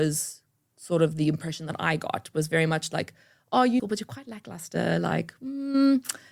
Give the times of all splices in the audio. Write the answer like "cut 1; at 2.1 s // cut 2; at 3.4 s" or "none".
cut 1; at 3.8 s